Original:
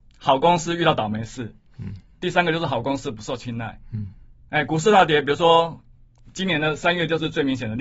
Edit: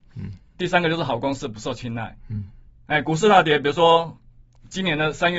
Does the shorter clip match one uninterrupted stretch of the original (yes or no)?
yes